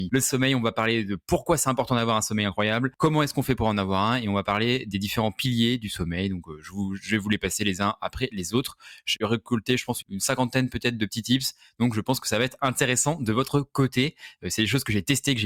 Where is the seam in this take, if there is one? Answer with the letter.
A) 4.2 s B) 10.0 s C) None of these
B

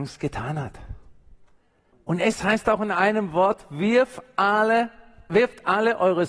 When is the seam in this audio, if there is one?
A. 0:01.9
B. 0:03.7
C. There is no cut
A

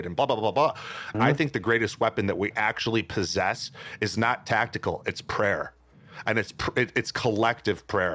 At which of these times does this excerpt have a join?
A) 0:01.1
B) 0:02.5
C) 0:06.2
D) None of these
A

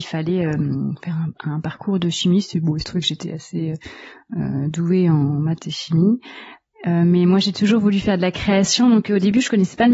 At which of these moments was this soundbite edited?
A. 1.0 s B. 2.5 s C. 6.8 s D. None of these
D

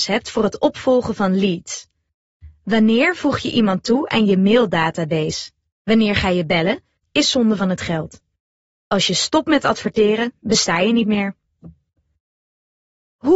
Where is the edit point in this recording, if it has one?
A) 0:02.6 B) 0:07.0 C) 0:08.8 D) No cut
B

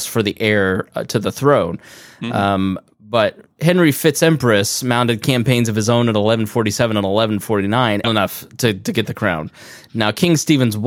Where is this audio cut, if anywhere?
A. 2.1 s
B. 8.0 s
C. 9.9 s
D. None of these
B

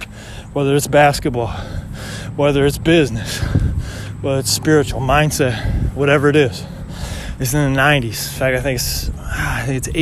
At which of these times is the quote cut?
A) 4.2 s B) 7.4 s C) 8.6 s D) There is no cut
B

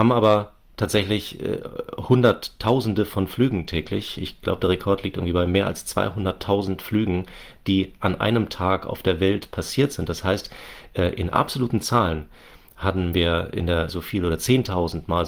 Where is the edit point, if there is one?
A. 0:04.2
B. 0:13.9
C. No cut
B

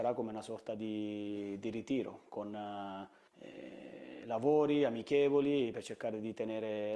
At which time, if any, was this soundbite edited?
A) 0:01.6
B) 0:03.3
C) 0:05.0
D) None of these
B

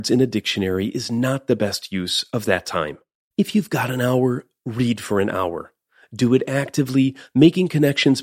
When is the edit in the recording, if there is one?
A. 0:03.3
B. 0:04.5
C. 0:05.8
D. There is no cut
A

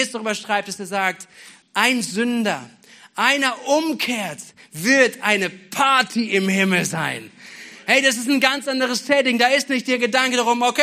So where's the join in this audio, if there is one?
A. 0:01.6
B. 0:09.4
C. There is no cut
A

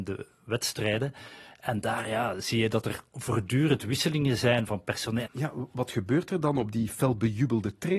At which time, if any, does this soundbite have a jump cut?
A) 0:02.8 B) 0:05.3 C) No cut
B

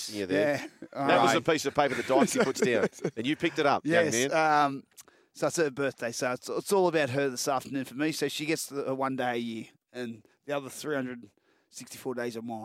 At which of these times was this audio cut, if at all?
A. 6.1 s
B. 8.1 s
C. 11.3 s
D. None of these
D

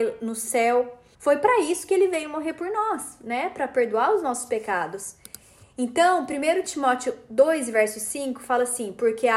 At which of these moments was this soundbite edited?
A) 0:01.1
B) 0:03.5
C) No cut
A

